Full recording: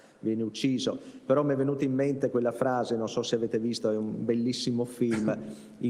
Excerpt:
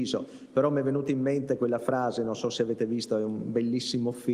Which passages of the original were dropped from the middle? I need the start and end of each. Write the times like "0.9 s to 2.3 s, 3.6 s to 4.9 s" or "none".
none